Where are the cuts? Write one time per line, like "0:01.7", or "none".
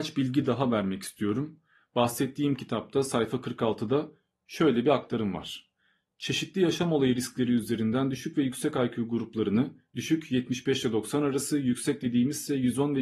none